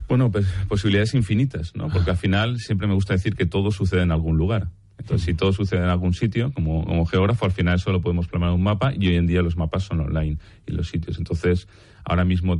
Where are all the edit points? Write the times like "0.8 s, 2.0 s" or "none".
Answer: none

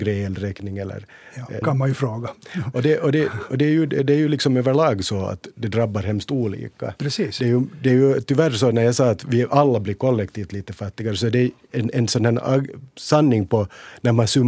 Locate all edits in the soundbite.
1.6 s

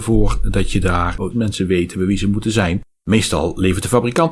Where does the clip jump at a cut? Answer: 1.3 s, 3.0 s

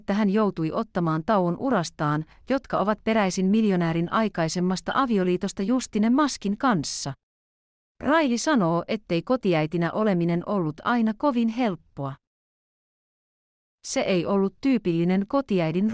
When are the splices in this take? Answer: 2.3 s

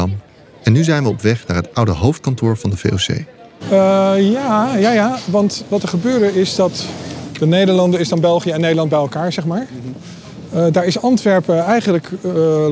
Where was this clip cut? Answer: 3.6 s

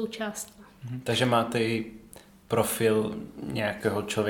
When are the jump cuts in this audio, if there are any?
none

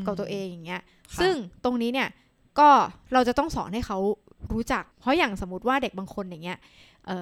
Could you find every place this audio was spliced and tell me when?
4.9 s

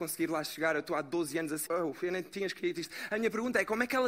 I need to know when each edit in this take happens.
1.7 s

